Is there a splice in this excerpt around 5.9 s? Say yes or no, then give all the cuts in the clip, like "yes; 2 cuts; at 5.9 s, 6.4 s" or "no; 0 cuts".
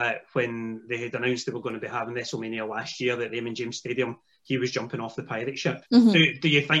yes; 1 cut; at 5.9 s